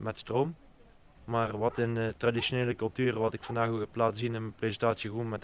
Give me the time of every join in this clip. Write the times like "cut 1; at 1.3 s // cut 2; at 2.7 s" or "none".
cut 1; at 1.2 s